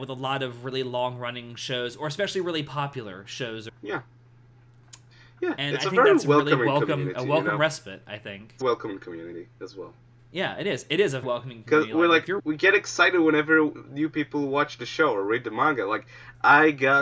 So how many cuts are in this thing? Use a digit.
3